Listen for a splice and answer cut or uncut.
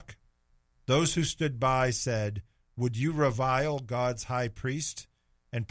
uncut